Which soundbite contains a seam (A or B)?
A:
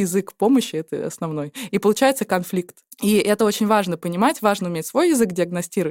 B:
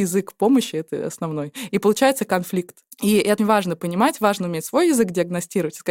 B